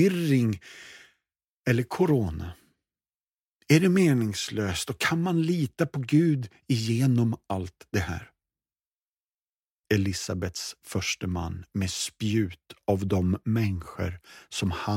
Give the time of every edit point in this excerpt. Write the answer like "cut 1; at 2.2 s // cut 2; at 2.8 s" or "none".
cut 1; at 9.8 s